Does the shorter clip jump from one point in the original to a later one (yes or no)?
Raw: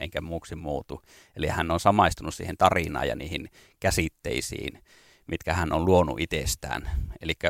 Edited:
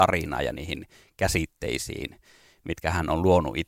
no